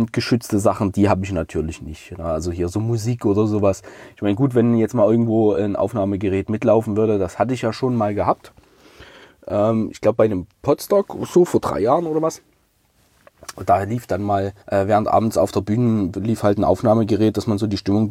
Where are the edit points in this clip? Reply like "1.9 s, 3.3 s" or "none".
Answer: 14.6 s, 16.1 s